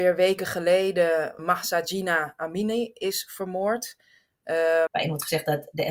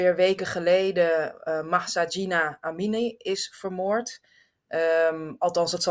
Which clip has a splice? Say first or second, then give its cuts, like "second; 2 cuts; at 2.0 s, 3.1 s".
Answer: first; 2 cuts; at 1.4 s, 4.9 s